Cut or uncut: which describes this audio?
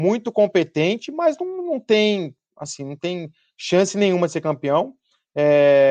uncut